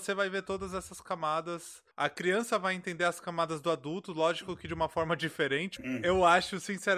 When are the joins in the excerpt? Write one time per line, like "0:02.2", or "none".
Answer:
0:01.9
0:05.8